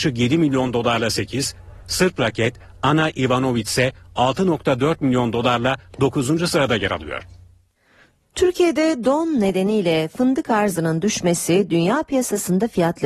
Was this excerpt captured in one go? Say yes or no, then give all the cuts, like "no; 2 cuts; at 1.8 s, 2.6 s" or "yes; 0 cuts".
yes; 0 cuts